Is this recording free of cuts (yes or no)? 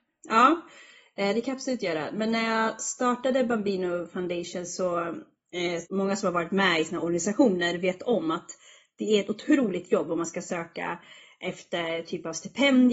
no